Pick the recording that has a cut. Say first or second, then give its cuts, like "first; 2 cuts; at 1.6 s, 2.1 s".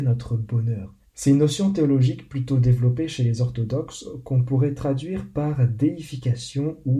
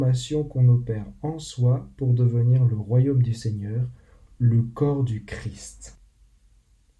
first; 1 cut; at 1.0 s